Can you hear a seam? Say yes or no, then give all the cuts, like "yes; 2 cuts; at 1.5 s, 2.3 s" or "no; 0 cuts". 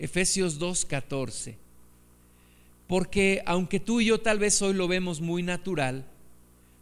no; 0 cuts